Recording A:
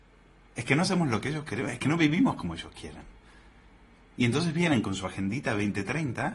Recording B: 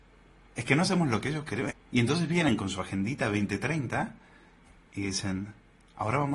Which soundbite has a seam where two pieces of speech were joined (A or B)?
B